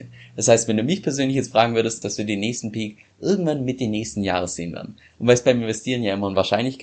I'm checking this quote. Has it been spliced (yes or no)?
yes